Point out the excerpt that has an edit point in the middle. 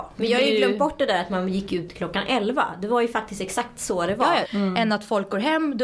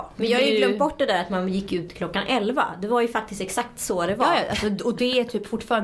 first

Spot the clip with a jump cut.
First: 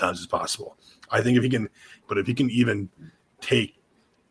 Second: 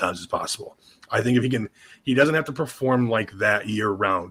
first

